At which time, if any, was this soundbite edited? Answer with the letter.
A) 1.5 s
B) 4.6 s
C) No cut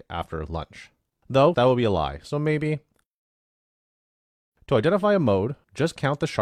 A